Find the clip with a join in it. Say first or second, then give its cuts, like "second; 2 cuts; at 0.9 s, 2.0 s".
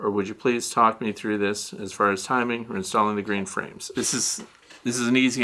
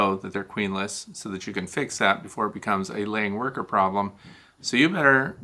first; 1 cut; at 3.9 s